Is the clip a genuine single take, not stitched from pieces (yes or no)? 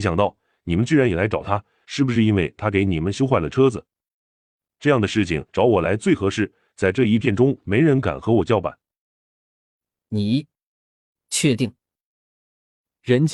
no